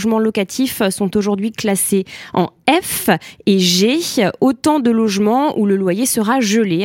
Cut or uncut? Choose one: uncut